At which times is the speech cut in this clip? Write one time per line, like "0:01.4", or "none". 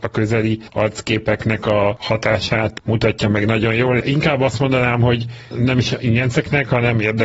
none